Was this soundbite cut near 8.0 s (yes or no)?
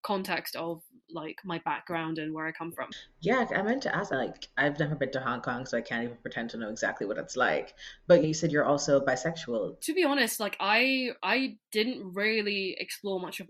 no